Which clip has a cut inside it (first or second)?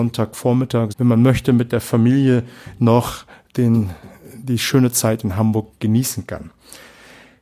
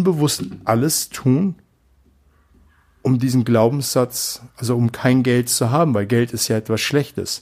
first